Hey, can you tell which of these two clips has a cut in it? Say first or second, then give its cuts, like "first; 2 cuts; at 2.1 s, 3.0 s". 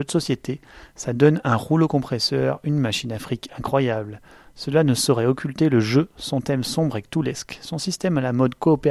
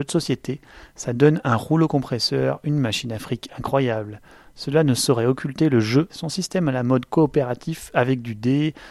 second; 1 cut; at 6.1 s